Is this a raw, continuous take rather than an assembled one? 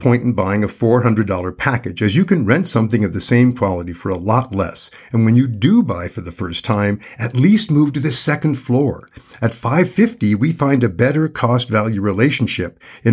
yes; 0 cuts

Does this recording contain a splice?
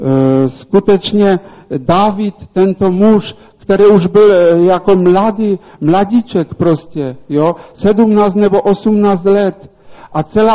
no; 0 cuts

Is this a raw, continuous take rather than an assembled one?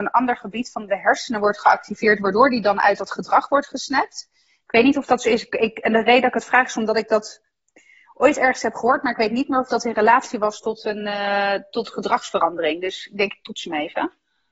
yes; 0 cuts

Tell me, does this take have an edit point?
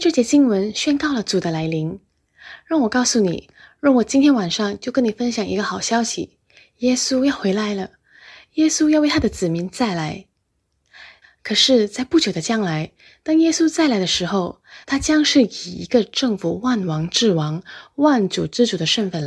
yes; 2 cuts; at 11.2 s, 14.8 s

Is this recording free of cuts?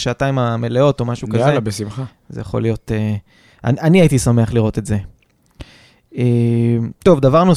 yes; 0 cuts

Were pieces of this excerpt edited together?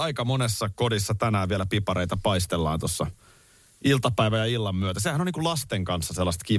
no; 0 cuts

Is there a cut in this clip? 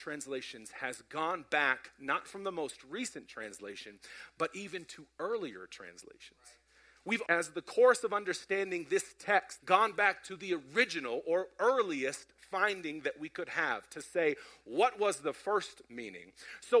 yes; 2 cuts; at 7.2 s, 9.6 s

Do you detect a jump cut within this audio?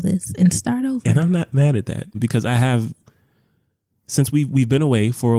yes; 1 cut; at 2.1 s

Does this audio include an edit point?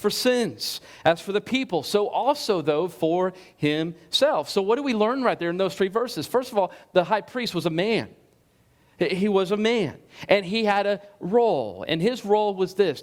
no; 0 cuts

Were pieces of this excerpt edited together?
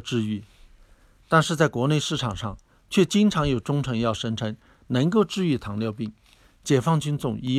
no; 0 cuts

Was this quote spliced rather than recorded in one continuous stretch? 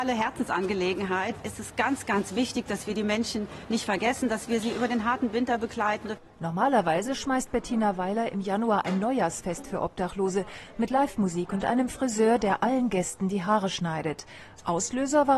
no; 0 cuts

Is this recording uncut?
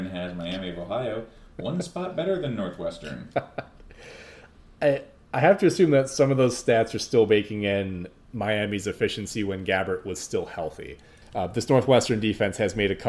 no; 1 cut; at 11.2 s

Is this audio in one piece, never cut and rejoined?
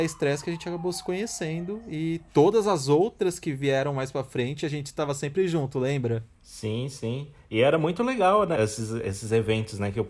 no; 2 cuts; at 6.3 s, 8.6 s

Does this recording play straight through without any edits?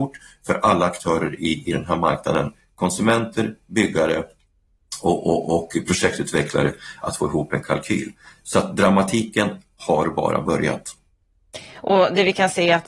yes; 0 cuts

